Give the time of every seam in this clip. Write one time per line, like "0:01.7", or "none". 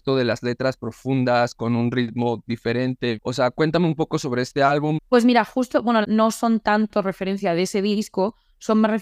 0:03.2
0:05.0
0:06.0